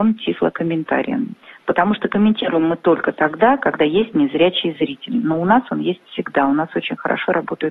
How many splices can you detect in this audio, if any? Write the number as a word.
zero